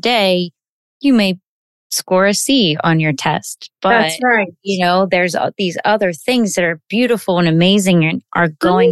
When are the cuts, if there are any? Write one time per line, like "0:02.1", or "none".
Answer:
none

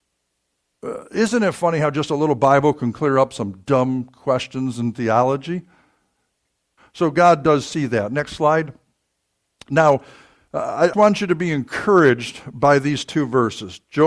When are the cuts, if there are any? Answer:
0:06.8
0:10.9

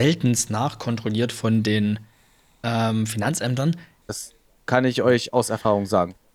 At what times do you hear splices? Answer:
0:04.0

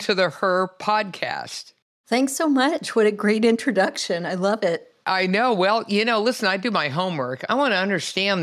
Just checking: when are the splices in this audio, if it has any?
none

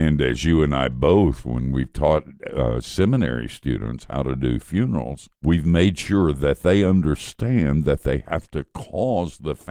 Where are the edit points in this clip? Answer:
0:05.3

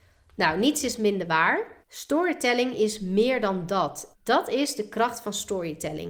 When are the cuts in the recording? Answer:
0:01.8
0:04.1

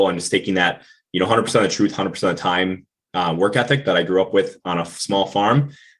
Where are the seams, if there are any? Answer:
none

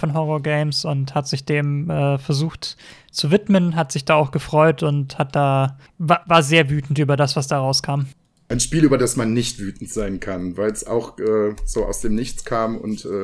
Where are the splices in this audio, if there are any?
none

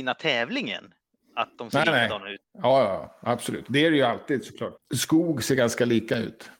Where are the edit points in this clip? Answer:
0:02.4
0:04.8

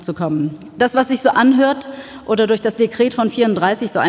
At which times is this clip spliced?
0:01.3

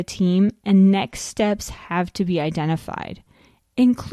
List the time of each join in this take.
none

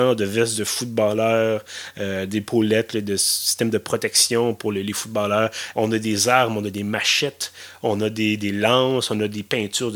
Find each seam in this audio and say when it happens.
0:05.7

